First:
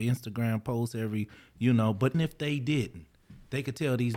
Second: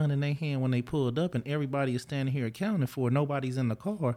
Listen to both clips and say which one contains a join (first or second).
first